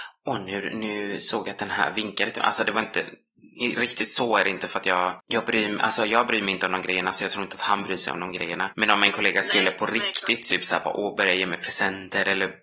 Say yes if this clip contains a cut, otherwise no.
no